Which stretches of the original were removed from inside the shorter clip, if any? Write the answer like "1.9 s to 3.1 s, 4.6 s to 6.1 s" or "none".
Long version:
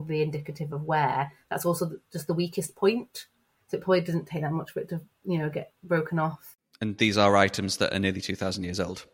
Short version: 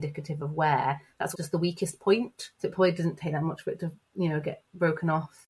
1.6 s to 2.1 s, 3.3 s to 3.6 s

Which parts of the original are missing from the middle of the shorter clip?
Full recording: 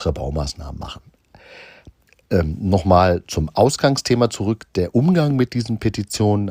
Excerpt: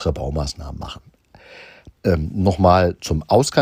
2.0 s to 2.2 s

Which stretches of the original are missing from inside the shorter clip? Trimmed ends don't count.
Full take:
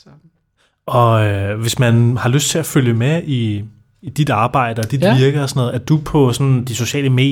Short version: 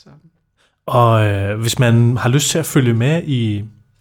none

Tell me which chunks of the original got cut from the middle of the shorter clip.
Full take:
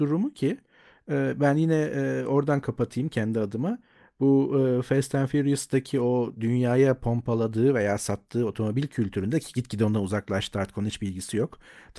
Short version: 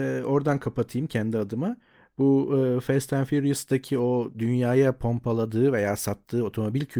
none

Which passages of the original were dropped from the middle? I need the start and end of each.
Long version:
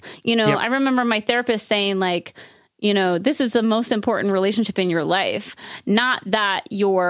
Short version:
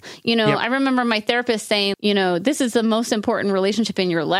1.9 s to 2.7 s

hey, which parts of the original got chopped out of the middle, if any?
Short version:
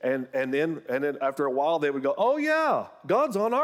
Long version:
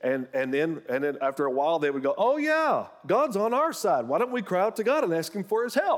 none

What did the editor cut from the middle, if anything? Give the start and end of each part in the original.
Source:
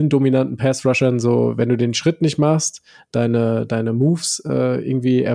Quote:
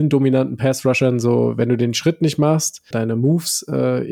2.9 s to 3.7 s

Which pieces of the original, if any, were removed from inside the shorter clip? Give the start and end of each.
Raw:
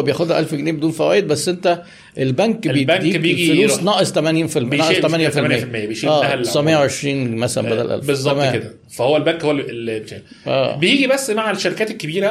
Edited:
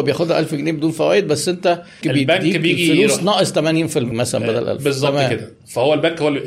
2.0 s to 2.6 s, 4.7 s to 7.3 s

